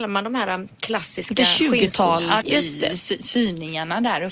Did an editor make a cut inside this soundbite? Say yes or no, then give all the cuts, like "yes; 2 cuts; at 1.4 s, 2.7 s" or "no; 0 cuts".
yes; 1 cut; at 2.4 s